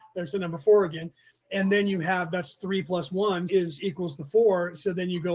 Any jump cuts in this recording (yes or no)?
yes